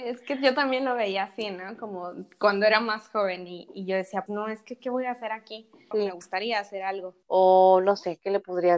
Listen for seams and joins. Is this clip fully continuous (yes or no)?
no